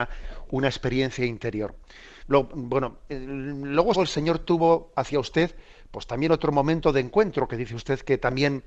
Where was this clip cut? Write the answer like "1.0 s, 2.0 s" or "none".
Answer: 2.2 s, 3.9 s